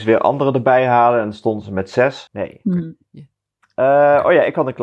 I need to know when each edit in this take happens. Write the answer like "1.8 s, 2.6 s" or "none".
2.3 s